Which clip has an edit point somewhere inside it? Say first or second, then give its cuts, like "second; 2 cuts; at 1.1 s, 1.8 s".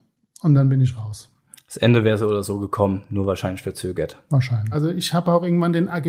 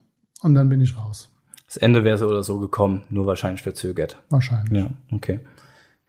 first; 1 cut; at 4.7 s